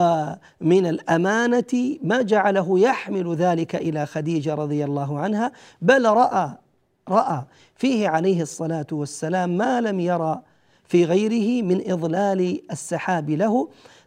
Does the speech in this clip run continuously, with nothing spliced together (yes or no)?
yes